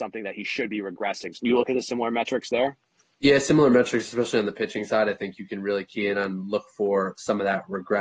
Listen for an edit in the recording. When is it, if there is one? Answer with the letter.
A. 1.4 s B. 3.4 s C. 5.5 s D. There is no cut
A